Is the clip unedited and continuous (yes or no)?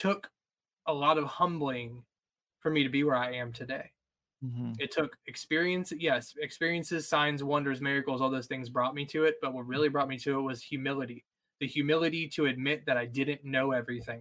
yes